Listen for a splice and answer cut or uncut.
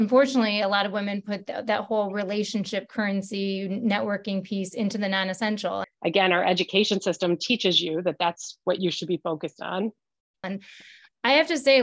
cut